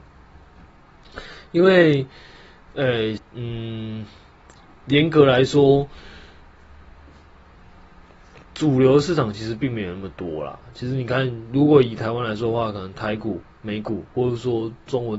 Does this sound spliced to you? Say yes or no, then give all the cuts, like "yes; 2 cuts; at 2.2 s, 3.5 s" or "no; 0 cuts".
yes; 3 cuts; at 3.2 s, 12.9 s, 14.1 s